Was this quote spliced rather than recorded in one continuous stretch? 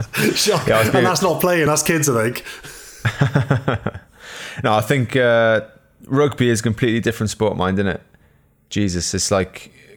no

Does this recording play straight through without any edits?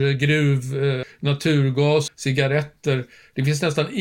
no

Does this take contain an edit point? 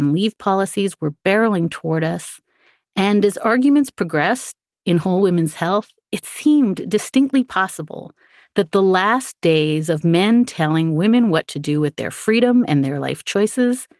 no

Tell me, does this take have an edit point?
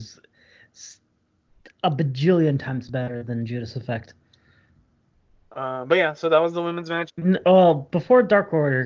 yes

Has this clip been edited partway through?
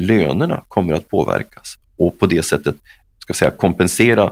yes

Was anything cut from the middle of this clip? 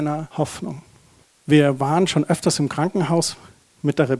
no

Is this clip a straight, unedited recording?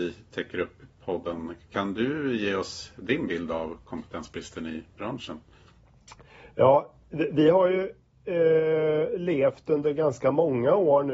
yes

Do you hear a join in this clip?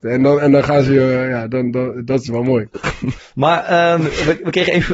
yes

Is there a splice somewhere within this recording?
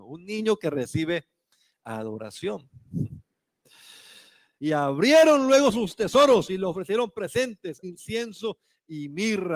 yes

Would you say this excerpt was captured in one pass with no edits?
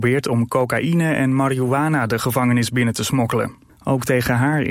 no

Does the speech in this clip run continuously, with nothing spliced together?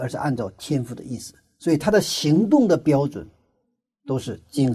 no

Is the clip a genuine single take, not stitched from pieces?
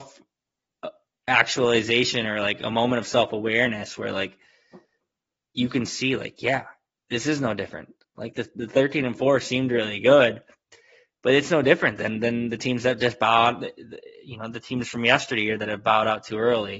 yes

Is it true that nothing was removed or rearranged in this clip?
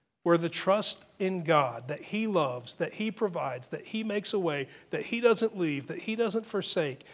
yes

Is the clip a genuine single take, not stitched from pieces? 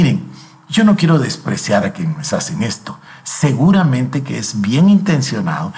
yes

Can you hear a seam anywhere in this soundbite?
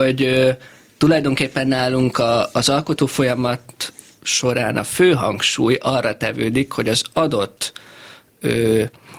no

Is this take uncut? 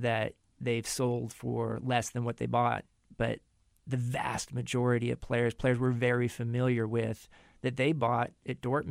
yes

